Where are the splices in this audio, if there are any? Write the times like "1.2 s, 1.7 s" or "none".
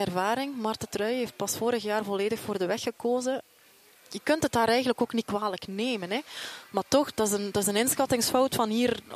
none